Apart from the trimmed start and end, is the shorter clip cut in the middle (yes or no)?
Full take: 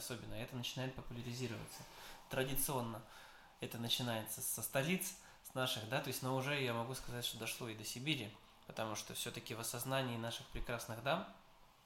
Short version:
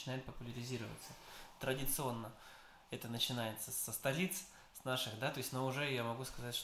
no